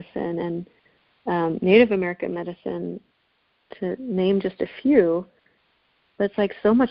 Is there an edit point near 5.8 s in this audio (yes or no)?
no